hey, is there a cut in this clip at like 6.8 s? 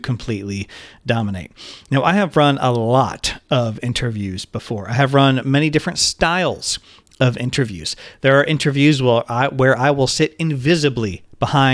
no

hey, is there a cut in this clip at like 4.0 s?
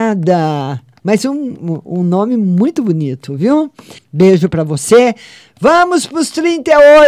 yes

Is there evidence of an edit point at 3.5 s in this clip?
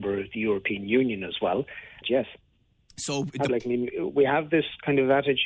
yes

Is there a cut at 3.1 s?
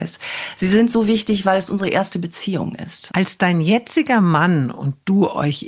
yes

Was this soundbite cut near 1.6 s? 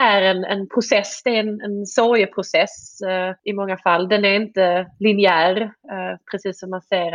no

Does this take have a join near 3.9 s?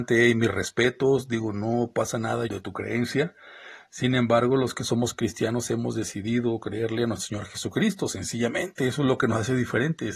no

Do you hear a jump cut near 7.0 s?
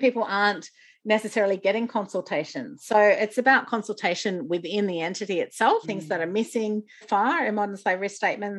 yes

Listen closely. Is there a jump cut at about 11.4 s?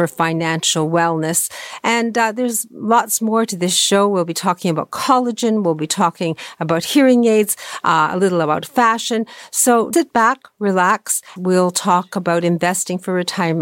yes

